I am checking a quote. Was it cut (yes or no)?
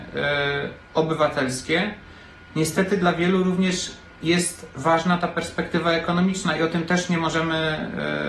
no